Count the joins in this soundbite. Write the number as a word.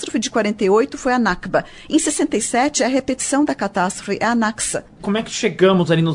one